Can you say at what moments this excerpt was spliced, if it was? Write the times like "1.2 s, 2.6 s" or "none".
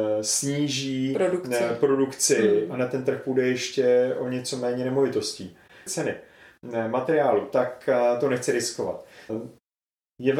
5.9 s, 9.3 s